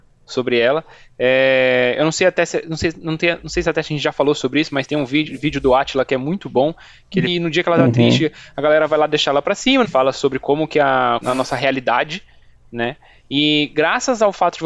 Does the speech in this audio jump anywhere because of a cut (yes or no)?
yes